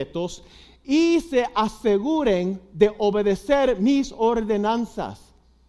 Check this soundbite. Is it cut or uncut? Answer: uncut